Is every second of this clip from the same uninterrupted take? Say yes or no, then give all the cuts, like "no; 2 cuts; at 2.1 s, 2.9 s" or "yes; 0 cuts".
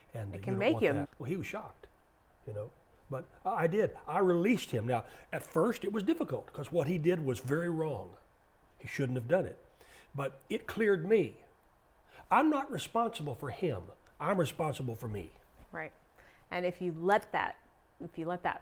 no; 1 cut; at 1.0 s